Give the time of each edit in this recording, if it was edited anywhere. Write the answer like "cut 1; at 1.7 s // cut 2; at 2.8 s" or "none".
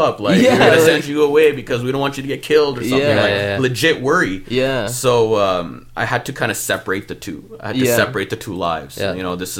none